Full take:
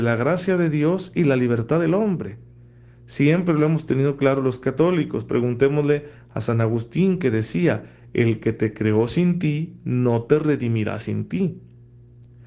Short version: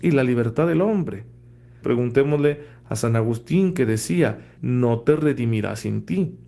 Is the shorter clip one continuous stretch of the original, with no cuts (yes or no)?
no